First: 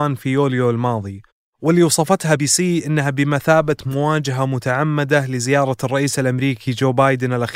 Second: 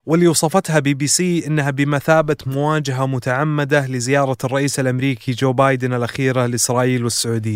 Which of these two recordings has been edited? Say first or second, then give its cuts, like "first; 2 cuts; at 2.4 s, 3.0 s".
first; 1 cut; at 2.4 s